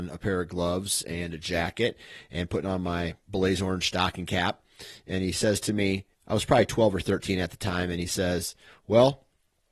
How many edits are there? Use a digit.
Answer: 1